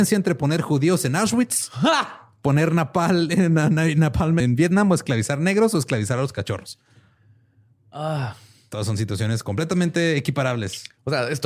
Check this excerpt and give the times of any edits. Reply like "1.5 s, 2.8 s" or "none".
4.4 s